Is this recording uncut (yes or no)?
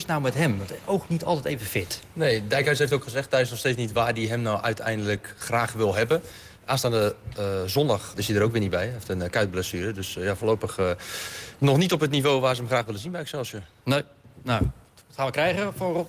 no